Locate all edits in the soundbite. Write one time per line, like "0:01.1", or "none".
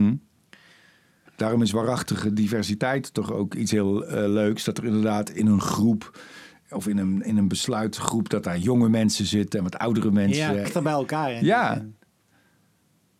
0:01.3
0:10.6